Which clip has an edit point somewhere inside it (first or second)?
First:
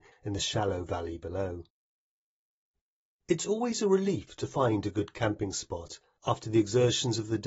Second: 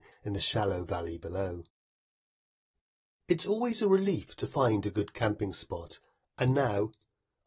first